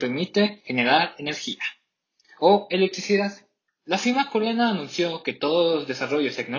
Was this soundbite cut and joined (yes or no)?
yes